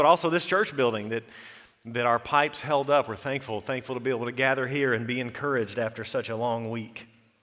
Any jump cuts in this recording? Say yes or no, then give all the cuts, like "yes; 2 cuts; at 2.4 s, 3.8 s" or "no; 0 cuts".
no; 0 cuts